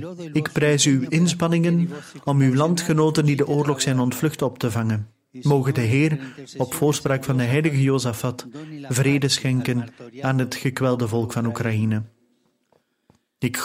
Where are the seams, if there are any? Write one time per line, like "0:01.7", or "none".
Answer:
none